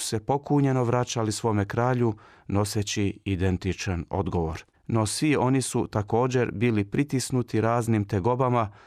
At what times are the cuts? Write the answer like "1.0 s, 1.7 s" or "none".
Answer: 4.7 s